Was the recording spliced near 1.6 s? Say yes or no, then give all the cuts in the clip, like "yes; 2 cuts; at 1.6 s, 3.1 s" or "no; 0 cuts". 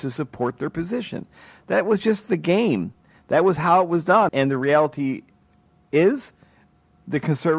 no; 1 cut; at 4.3 s